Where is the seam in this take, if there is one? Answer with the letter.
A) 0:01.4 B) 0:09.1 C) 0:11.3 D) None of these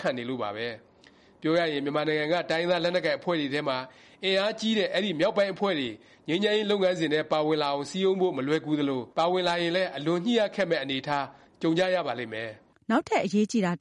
B